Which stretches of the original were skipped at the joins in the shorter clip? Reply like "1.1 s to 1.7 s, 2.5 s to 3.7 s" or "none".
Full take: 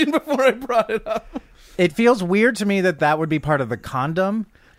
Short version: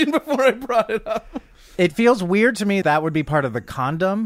2.8 s to 3.0 s